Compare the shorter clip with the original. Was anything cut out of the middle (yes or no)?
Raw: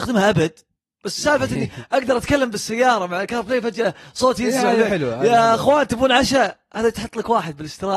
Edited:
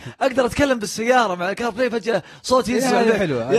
no